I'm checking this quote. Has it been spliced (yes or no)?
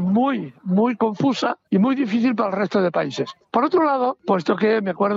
yes